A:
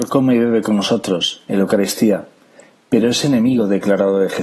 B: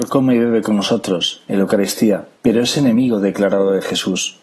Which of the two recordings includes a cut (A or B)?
B